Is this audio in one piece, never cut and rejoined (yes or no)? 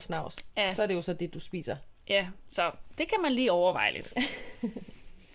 yes